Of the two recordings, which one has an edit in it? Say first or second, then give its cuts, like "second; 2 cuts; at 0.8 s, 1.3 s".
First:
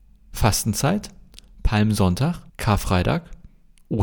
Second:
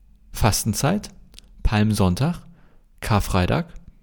first; 1 cut; at 2.5 s